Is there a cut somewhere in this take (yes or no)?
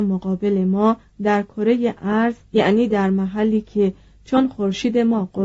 yes